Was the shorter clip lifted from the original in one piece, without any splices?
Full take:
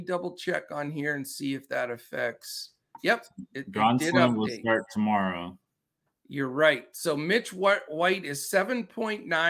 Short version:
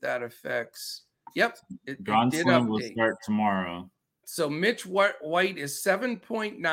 no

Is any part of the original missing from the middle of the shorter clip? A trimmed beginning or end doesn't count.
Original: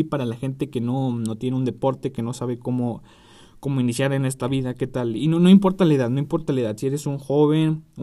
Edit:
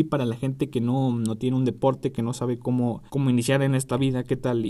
yes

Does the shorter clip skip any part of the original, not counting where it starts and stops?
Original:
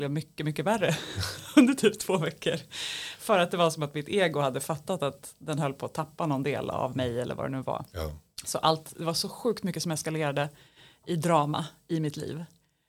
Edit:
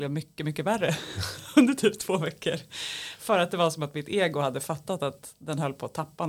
no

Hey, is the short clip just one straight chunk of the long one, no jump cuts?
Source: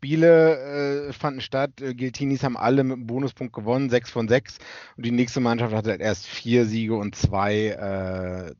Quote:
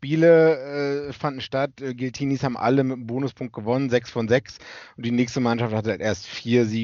yes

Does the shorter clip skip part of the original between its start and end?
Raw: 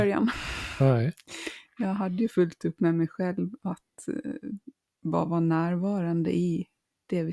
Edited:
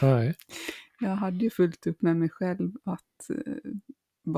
no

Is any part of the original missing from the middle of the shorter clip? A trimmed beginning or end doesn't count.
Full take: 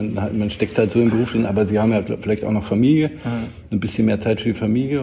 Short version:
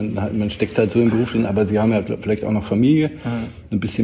no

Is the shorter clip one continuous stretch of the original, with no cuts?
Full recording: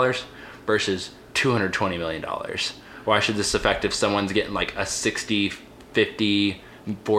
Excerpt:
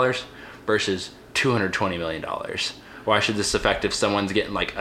yes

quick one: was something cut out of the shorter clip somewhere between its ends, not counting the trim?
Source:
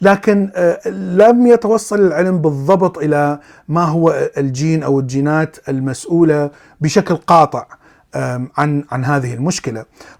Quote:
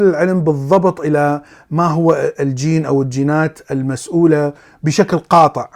no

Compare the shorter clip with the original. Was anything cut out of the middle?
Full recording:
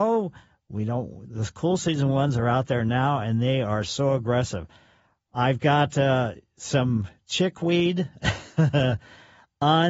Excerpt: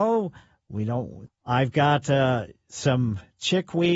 yes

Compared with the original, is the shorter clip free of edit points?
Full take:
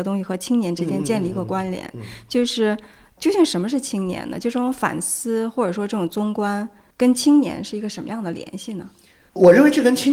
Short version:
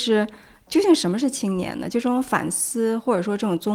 yes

